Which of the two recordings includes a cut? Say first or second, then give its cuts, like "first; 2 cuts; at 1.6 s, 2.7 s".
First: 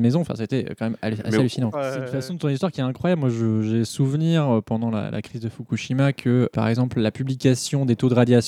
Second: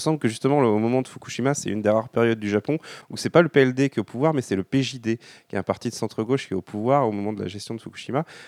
first; 2 cuts; at 1.7 s, 6.5 s